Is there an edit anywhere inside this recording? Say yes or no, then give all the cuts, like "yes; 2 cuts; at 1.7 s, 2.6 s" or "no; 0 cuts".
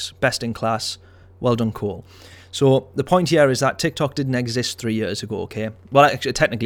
no; 0 cuts